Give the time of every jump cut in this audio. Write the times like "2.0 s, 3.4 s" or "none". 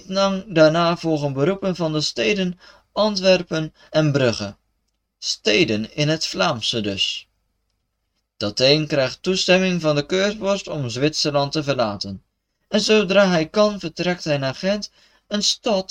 3.9 s